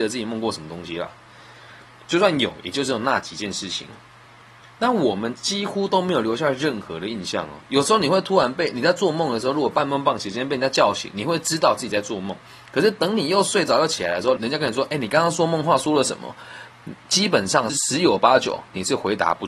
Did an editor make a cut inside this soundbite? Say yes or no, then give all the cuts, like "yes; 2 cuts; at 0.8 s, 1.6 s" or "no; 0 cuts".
yes; 2 cuts; at 14.4 s, 17.7 s